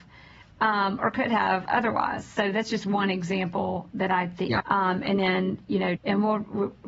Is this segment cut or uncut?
cut